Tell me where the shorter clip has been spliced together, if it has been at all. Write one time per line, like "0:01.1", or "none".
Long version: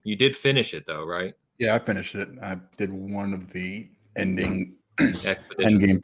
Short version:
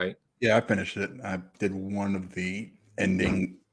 none